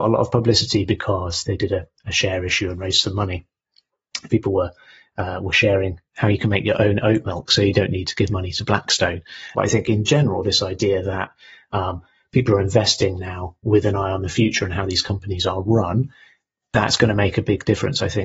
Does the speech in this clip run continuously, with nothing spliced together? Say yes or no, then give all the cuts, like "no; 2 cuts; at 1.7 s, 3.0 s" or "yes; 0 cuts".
no; 3 cuts; at 1.4 s, 4.3 s, 9.5 s